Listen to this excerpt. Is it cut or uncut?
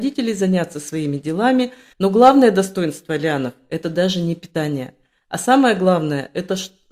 cut